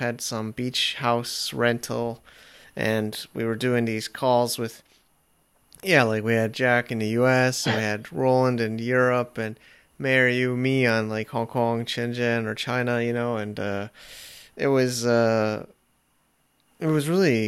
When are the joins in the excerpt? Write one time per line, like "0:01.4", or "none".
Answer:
none